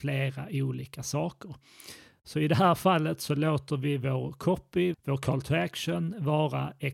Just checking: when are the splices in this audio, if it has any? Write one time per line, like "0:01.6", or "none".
0:04.9